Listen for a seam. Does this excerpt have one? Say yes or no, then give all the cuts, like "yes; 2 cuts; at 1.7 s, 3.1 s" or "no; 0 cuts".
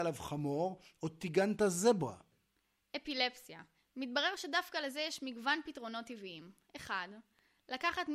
no; 0 cuts